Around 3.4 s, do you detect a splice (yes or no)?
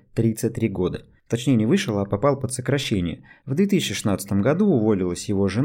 yes